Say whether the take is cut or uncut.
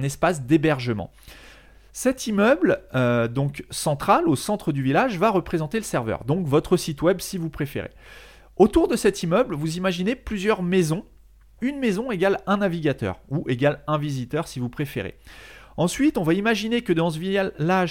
cut